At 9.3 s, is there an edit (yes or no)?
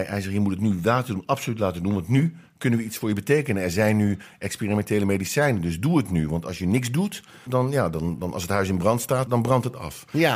yes